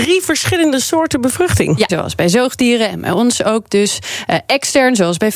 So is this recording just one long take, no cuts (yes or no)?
no